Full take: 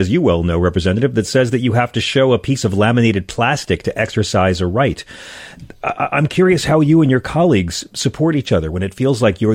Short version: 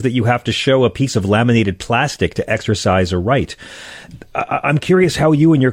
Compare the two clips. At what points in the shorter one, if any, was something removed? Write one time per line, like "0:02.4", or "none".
none